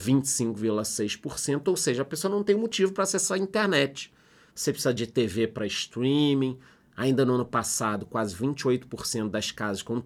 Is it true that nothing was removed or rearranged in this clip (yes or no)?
no